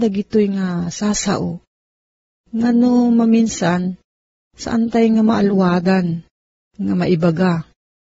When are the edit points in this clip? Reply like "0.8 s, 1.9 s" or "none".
none